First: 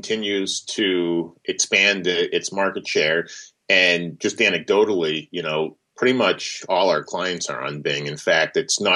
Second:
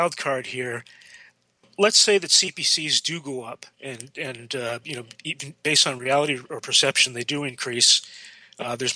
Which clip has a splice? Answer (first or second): second